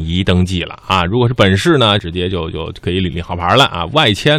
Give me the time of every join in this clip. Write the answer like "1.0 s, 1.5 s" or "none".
2.0 s